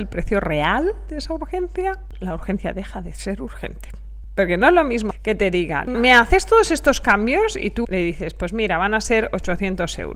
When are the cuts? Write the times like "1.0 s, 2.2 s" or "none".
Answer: 2.1 s, 5.9 s, 7.8 s